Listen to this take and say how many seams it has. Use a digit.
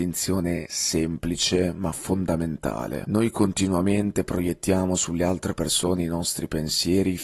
1